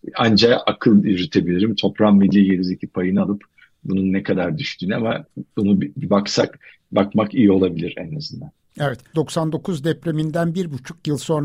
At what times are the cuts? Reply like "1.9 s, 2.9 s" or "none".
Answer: 9.1 s